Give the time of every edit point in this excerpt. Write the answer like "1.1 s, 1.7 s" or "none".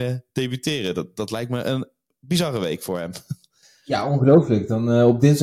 none